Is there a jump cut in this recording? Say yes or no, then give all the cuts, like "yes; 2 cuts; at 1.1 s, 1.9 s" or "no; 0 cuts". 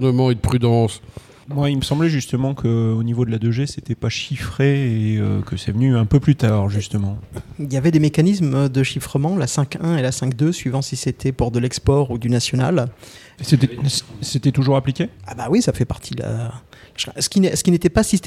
yes; 2 cuts; at 13.4 s, 15.2 s